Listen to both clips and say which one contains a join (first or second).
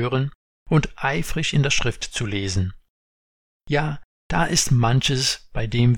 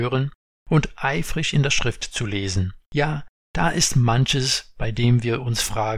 second